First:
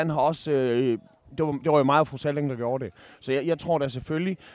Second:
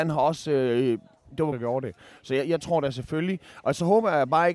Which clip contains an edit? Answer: second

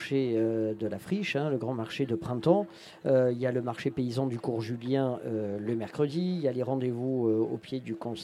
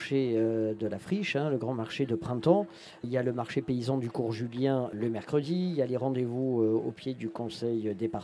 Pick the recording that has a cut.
second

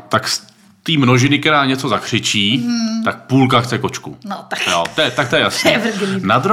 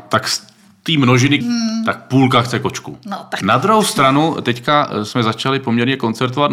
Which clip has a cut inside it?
second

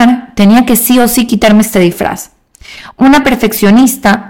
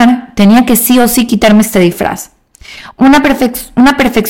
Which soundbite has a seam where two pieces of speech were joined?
first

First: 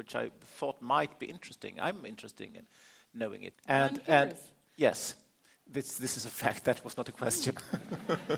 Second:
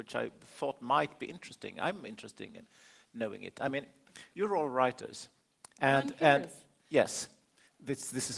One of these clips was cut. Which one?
first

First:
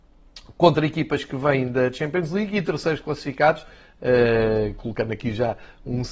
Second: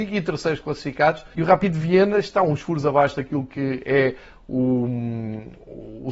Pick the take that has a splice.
second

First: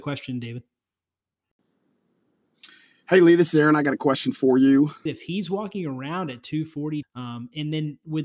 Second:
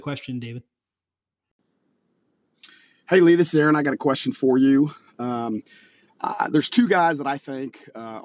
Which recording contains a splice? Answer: first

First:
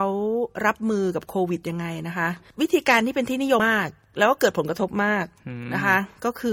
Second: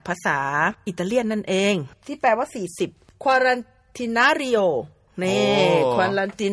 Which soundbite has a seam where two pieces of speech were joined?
first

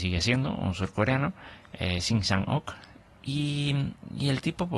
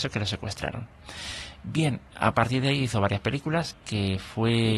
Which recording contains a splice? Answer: second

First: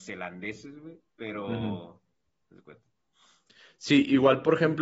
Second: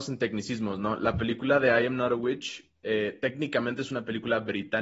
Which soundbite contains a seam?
first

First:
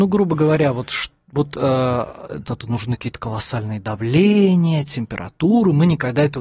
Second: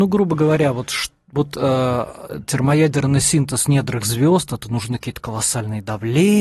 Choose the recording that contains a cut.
first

